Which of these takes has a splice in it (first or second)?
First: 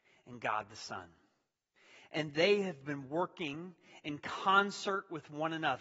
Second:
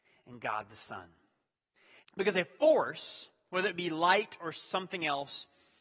second